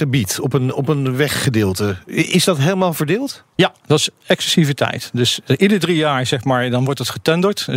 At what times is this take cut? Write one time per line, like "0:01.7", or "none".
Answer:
none